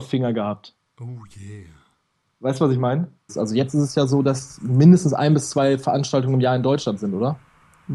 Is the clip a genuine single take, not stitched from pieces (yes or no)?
no